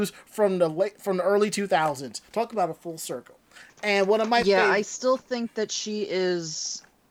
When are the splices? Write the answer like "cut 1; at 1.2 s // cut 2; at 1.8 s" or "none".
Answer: none